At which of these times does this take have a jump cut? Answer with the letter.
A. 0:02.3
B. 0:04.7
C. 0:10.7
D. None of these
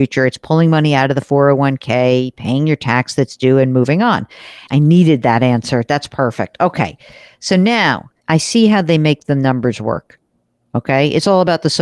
B